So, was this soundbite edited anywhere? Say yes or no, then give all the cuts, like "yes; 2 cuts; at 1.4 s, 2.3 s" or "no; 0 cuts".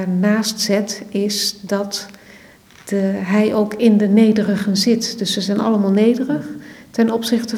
no; 0 cuts